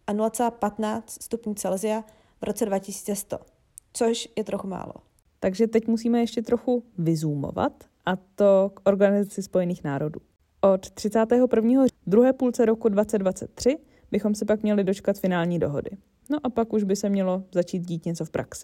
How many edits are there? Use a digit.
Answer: 1